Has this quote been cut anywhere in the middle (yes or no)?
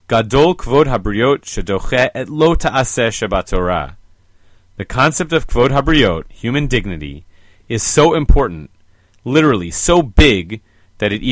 no